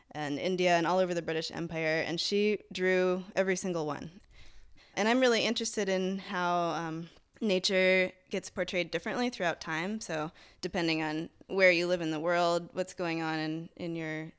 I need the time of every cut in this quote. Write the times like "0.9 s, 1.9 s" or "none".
4.8 s